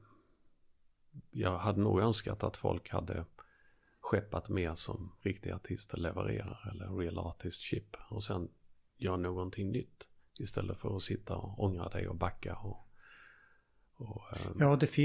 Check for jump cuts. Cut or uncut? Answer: cut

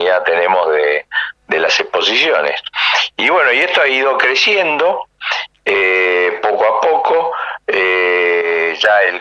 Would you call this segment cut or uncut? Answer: uncut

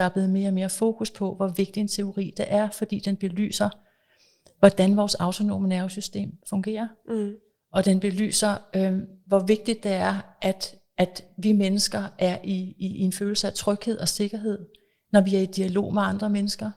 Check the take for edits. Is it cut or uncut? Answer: uncut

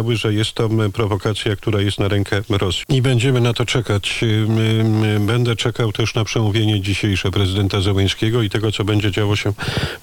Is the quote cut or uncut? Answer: cut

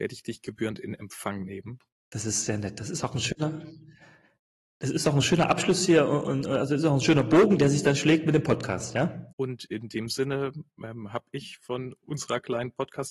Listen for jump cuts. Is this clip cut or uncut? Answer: cut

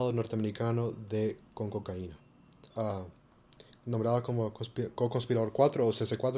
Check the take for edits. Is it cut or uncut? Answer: cut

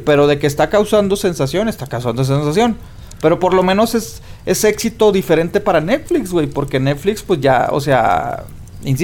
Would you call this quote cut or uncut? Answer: uncut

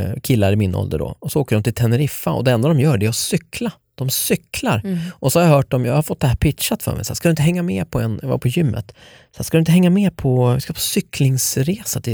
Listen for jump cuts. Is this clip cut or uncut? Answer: uncut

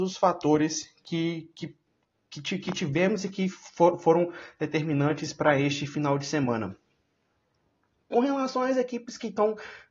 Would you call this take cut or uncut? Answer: uncut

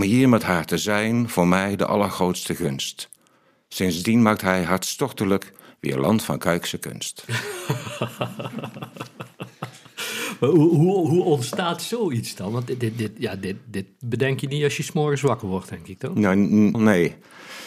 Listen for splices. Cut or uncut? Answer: cut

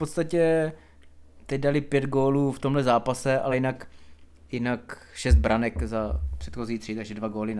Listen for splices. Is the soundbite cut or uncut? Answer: uncut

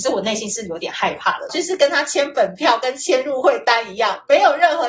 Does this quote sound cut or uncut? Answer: cut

